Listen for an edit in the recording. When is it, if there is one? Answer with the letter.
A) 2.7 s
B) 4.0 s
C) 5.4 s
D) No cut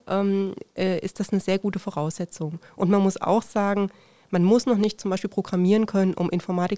D